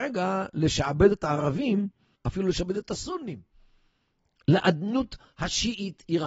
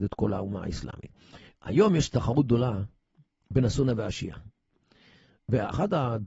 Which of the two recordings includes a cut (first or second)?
first